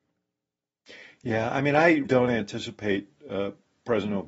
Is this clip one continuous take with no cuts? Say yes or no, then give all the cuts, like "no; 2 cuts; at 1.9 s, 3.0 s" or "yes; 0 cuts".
no; 1 cut; at 2.0 s